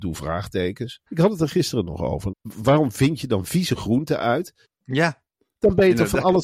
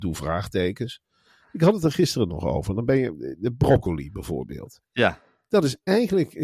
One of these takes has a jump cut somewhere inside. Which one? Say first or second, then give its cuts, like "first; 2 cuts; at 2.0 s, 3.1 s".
first; 3 cuts; at 1.1 s, 2.3 s, 4.6 s